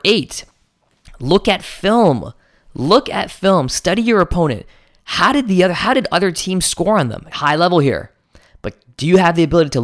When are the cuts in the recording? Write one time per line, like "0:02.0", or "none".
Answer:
0:07.3